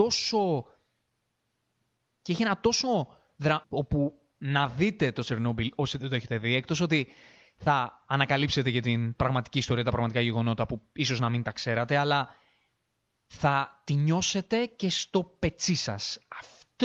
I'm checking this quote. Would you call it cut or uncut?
cut